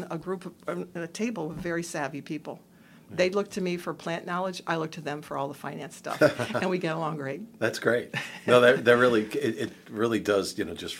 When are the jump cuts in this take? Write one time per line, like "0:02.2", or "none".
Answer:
none